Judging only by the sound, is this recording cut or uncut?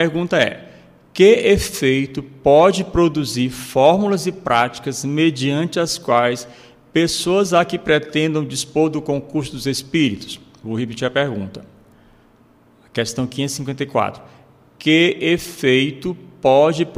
uncut